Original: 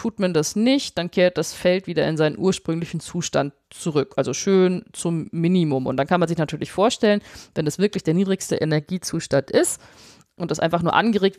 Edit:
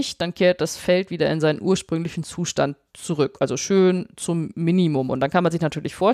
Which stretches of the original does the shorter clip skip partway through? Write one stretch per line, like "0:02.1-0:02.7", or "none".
none